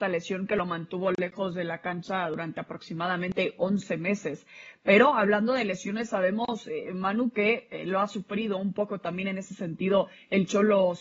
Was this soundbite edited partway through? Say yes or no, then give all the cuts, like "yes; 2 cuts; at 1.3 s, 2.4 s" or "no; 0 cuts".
no; 0 cuts